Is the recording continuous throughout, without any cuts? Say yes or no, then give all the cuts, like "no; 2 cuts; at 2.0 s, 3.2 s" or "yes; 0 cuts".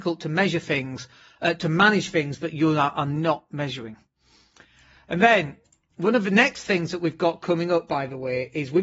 yes; 0 cuts